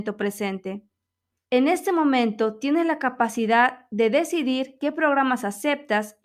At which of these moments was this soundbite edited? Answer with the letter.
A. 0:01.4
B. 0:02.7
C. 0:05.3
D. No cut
A